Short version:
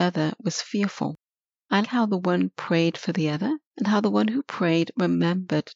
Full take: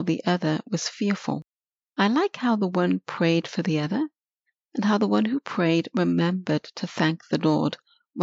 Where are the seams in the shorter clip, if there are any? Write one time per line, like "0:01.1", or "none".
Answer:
0:01.8
0:03.7